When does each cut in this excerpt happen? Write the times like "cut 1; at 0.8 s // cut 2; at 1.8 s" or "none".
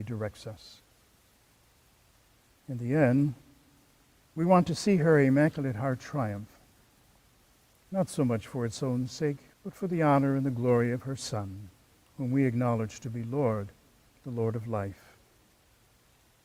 cut 1; at 2.6 s // cut 2; at 9.5 s